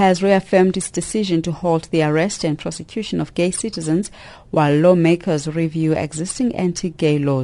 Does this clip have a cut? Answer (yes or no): no